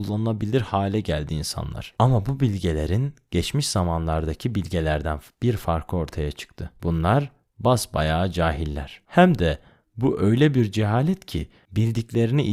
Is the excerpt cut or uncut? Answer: uncut